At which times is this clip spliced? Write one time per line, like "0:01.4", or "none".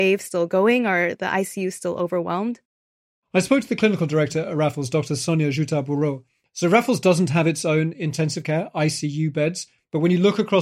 0:06.5